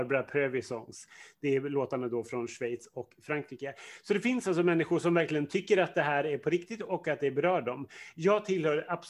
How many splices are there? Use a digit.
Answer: 0